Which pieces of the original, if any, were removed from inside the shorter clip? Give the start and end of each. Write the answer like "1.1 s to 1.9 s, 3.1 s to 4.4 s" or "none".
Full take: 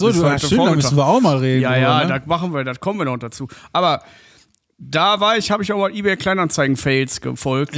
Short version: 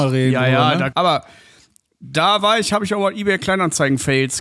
2.2 s to 3.7 s